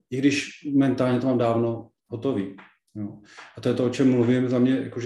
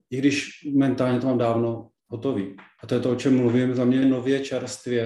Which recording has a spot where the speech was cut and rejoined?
second; 2 cuts; at 2.8 s, 4.0 s

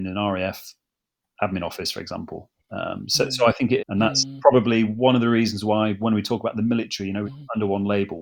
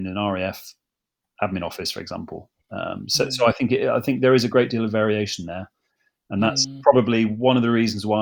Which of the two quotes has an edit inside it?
first; 2 cuts; at 3.8 s, 7.2 s

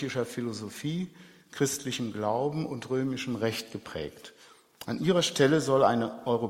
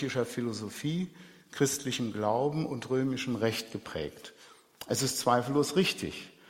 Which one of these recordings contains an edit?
first; 1 cut; at 4.8 s

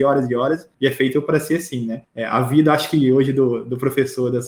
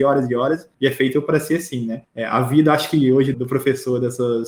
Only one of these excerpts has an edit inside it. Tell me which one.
second; 1 cut; at 3.3 s

